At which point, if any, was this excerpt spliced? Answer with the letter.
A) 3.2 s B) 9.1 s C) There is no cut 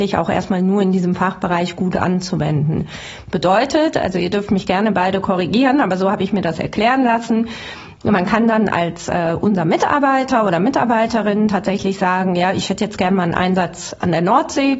C